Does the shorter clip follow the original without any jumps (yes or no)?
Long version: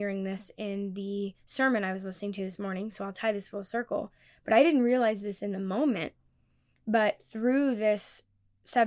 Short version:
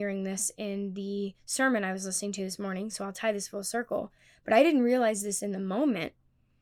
yes